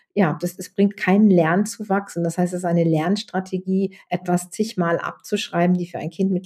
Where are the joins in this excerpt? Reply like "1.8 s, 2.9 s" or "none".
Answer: none